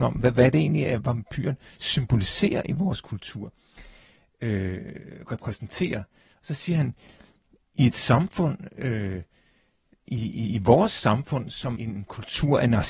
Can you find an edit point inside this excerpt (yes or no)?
yes